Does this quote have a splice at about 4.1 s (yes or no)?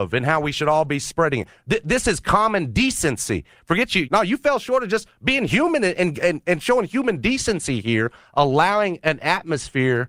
yes